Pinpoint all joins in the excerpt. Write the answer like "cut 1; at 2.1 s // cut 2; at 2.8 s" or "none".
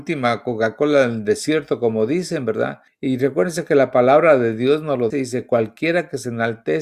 cut 1; at 2.9 s // cut 2; at 5.1 s